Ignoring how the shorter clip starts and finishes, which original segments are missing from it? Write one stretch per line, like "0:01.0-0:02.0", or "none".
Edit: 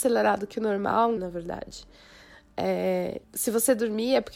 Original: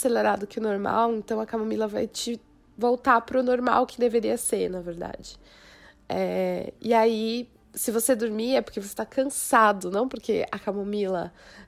0:01.2-0:04.7
0:06.8-0:07.6